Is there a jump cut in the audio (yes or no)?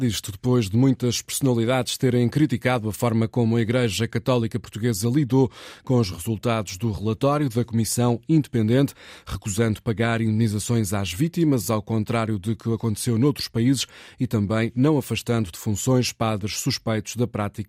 no